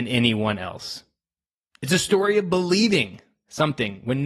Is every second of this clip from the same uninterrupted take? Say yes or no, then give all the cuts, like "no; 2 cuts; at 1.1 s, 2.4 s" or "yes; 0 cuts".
yes; 0 cuts